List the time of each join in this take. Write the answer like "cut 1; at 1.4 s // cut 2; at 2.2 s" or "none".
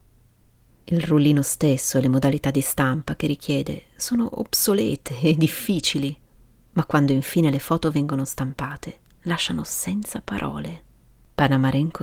none